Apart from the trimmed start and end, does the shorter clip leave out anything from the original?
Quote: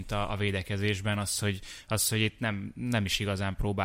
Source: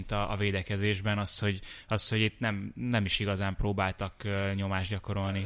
no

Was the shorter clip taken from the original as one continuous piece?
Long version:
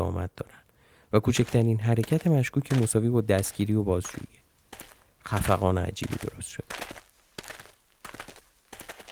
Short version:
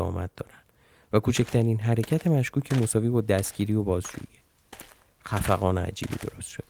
yes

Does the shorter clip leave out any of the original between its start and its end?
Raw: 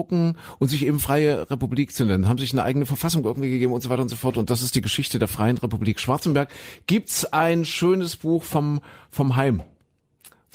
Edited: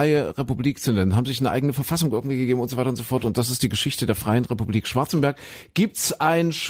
no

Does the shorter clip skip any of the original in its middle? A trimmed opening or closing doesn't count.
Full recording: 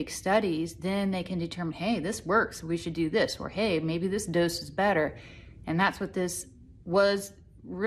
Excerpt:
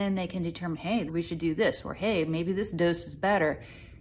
yes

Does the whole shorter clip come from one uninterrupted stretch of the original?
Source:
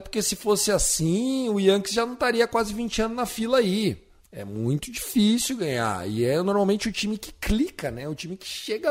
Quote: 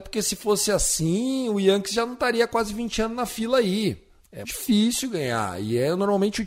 no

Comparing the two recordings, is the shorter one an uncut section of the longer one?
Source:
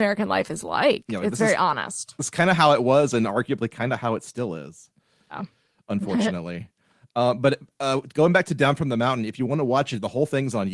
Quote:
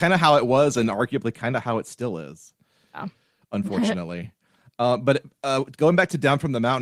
yes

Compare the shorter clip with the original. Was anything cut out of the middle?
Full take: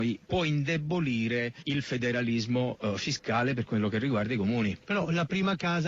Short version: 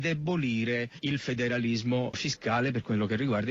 yes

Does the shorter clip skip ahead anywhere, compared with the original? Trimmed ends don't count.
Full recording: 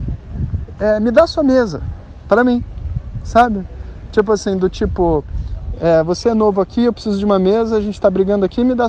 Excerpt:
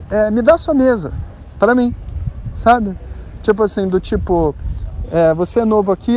no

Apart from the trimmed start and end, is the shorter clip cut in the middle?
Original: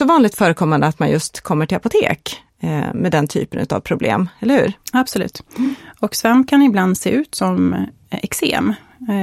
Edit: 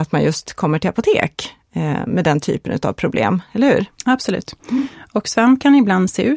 no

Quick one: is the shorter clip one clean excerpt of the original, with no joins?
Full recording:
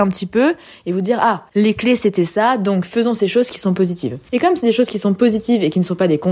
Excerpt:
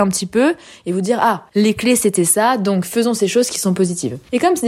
yes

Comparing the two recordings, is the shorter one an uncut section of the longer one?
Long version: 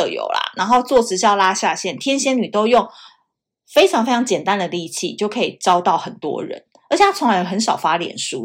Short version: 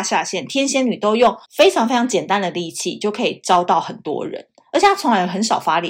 no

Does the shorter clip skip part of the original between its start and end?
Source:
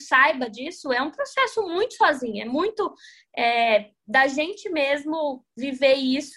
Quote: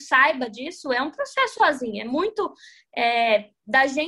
yes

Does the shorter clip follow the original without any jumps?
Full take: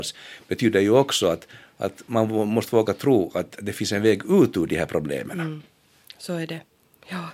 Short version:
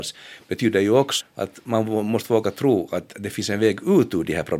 no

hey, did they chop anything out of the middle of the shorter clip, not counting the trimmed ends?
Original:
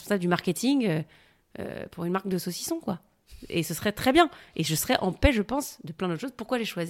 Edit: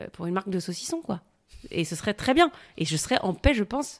no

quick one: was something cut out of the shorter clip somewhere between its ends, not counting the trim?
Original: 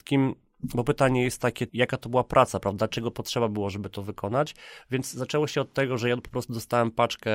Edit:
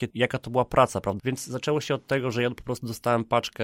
yes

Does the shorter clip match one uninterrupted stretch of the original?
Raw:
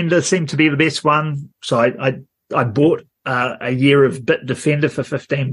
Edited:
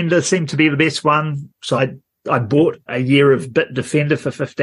no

